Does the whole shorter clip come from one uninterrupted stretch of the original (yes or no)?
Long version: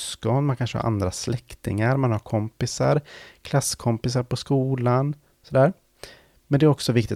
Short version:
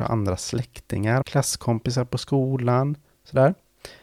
no